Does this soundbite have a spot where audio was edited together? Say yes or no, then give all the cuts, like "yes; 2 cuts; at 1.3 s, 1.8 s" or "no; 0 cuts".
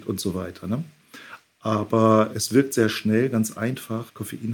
no; 0 cuts